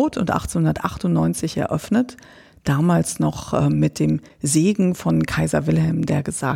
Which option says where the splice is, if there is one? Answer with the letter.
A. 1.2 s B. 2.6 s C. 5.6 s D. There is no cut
D